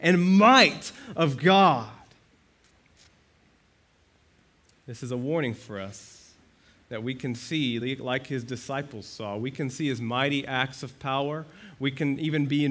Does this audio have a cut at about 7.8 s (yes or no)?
no